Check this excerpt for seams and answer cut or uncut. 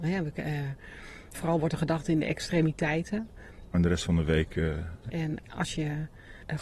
cut